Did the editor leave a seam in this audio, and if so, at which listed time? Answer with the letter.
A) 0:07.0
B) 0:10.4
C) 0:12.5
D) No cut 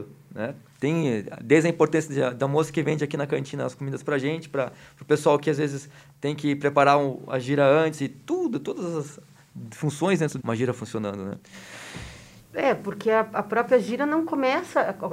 B